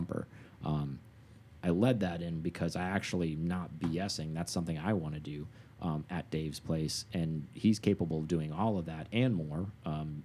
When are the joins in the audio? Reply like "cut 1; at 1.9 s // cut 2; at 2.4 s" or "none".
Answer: none